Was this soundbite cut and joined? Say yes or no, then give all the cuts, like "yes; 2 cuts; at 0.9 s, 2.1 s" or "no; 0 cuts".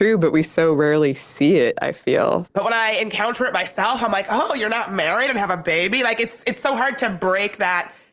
yes; 1 cut; at 2.5 s